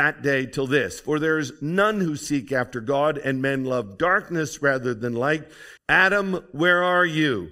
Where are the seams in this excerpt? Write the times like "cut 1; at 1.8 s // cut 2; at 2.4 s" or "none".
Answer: cut 1; at 5.8 s